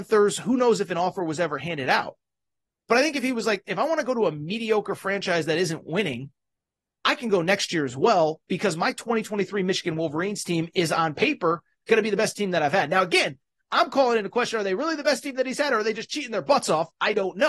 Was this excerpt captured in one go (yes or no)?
yes